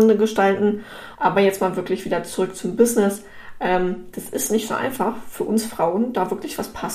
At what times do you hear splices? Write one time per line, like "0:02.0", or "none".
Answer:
0:01.1

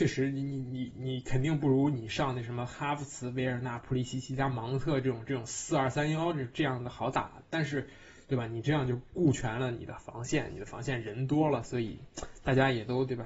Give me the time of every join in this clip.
none

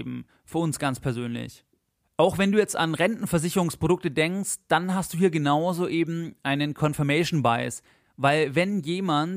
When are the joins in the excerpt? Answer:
none

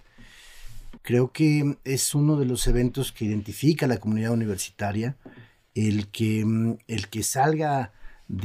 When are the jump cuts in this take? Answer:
0:01.0

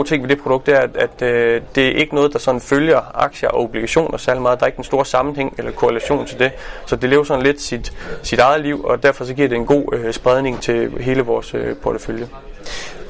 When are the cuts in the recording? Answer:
0:10.6

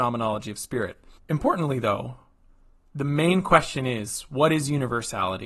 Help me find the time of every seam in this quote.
0:01.2

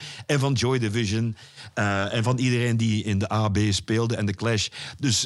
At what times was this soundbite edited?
none

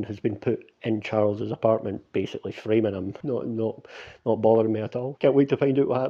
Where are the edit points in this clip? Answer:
0:03.2
0:05.2

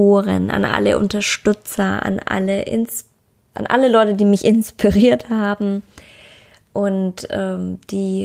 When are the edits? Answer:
0:03.5

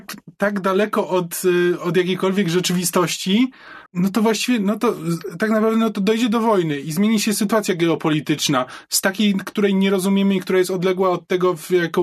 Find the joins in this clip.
0:03.9

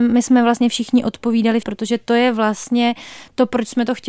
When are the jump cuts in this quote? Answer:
0:01.6

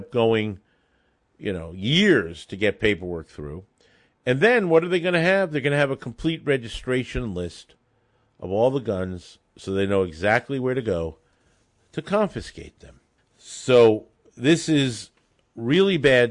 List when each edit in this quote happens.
0:13.2

